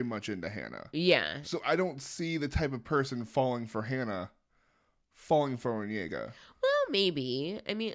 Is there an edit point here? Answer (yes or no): no